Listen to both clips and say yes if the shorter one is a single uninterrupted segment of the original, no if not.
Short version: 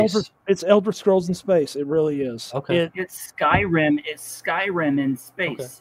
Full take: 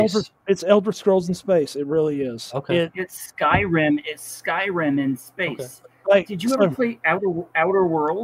yes